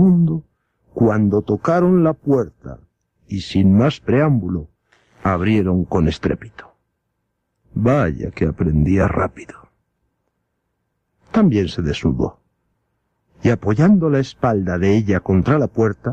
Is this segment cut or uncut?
cut